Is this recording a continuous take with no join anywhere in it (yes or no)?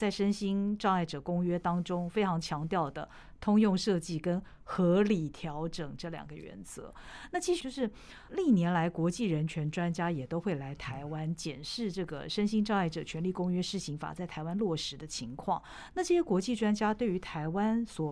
no